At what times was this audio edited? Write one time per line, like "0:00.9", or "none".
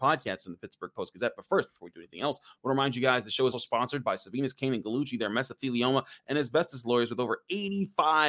0:03.5